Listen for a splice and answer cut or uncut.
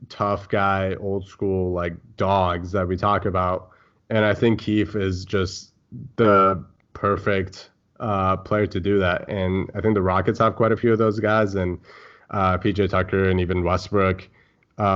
uncut